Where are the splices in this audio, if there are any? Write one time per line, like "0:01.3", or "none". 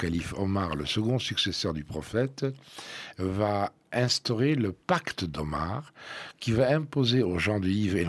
none